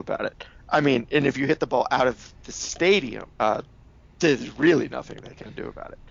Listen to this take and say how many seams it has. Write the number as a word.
one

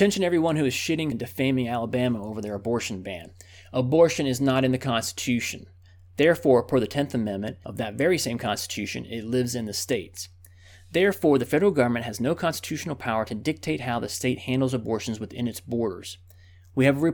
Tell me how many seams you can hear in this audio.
one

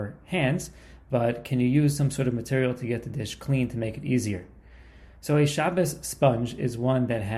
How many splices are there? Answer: zero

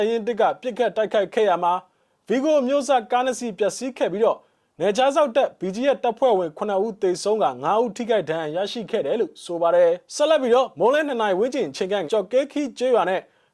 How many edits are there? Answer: two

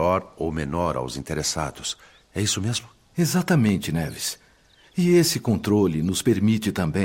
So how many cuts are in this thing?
zero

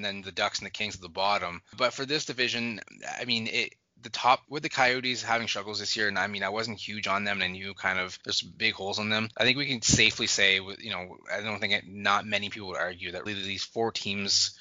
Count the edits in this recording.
two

